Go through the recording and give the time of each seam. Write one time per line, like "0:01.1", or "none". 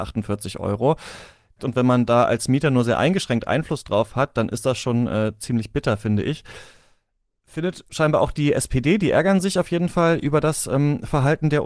0:01.6